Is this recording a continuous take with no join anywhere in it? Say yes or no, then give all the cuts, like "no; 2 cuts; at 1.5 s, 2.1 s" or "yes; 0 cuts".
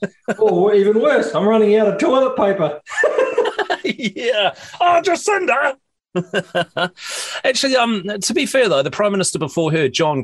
yes; 0 cuts